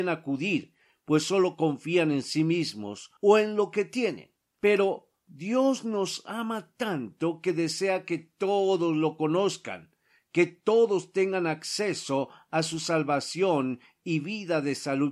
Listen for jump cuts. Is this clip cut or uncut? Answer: uncut